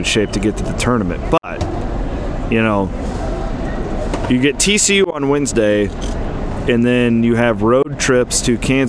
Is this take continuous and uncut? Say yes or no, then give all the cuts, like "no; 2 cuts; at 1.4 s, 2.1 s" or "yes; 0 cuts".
yes; 0 cuts